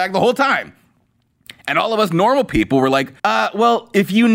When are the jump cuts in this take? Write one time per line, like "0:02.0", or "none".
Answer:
0:03.2